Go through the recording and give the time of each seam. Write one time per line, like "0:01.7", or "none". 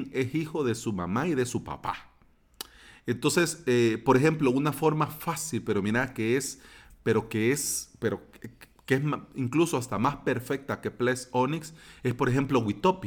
none